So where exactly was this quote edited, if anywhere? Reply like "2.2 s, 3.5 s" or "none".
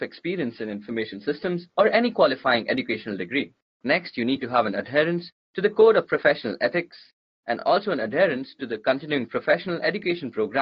none